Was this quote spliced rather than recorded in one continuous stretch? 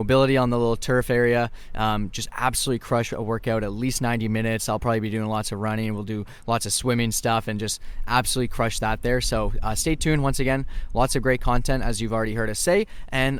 no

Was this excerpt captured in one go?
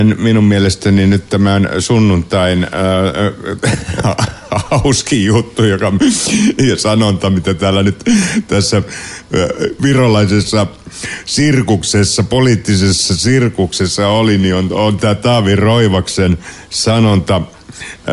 yes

